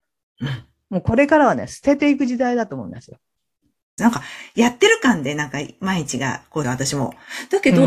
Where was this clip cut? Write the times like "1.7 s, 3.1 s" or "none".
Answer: 4.0 s, 6.6 s